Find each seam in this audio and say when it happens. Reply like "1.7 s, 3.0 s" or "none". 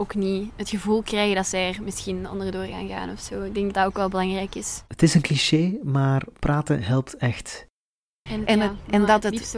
3.7 s, 8.3 s